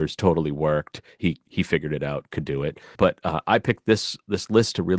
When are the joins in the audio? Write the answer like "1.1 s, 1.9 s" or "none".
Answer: 2.9 s

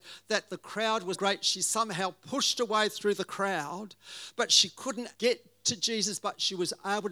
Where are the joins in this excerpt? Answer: 1.1 s, 5.1 s

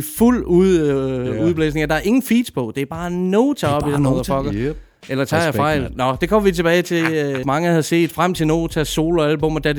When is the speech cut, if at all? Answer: 5.9 s, 7.4 s

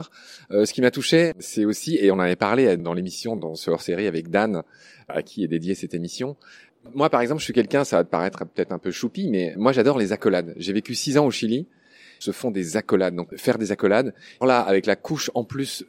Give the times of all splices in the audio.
12.2 s, 13.3 s, 14.4 s

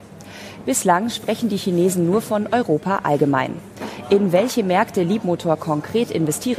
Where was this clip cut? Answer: none

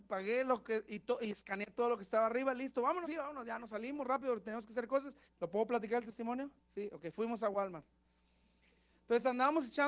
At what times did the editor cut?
3.0 s, 5.3 s, 6.6 s

